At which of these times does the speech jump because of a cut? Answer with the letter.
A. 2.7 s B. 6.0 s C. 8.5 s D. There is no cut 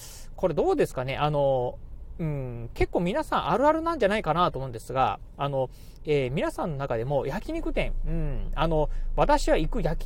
B